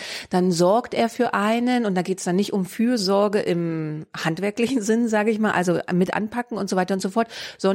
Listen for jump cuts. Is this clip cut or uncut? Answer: uncut